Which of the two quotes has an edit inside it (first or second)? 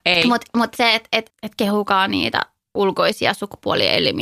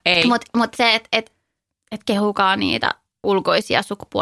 first